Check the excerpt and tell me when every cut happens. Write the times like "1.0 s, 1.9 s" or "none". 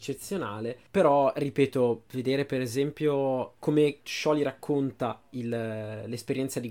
none